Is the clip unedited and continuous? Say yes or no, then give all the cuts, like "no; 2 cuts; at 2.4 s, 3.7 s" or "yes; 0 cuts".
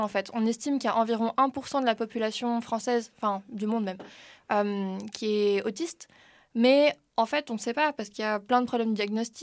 yes; 0 cuts